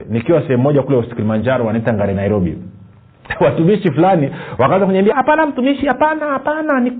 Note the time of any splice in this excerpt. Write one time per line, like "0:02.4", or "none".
0:05.1